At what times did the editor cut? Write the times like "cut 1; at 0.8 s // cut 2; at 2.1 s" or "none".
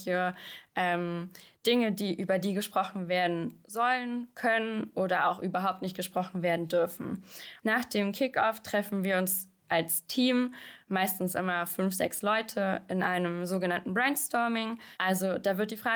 cut 1; at 7.6 s // cut 2; at 15.0 s